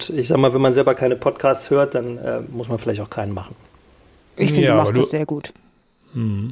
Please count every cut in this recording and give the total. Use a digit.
0